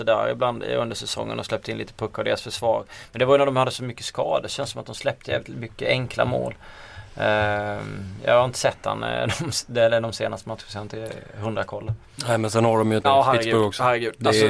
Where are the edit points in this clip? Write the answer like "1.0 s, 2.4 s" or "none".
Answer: 13.0 s